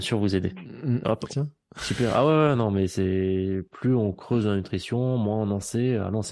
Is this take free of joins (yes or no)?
no